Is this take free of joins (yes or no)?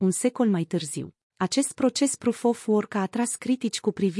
no